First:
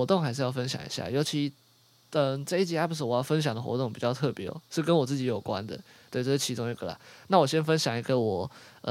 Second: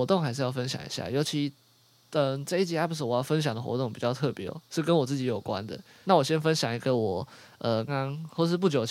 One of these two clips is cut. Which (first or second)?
second